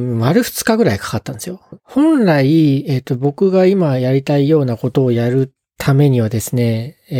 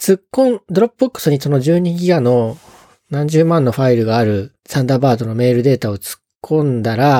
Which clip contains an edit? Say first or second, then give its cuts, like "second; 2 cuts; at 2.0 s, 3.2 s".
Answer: first; 1 cut; at 1.8 s